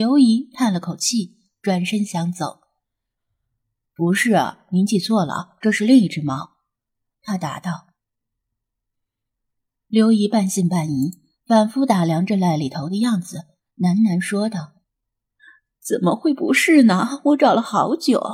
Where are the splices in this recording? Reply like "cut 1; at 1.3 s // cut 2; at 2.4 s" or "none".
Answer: cut 1; at 3.2 s